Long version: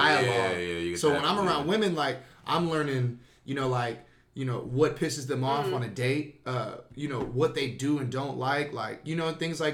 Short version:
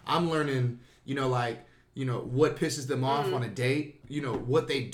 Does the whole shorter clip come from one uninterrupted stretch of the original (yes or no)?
no